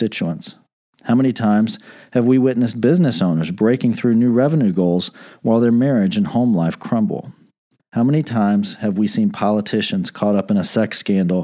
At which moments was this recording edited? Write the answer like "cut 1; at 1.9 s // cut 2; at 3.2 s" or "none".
cut 1; at 7.8 s